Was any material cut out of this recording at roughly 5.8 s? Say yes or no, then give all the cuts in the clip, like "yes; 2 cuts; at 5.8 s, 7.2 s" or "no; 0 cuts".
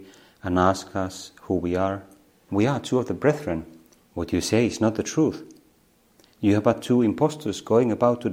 no; 2 cuts; at 2.5 s, 4.0 s